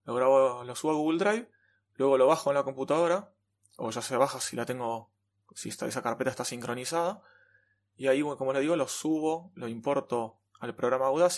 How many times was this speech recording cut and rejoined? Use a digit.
0